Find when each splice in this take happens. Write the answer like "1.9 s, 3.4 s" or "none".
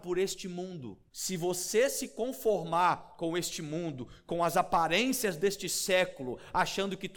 1.1 s